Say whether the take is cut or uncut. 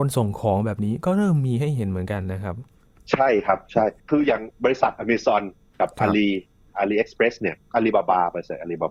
uncut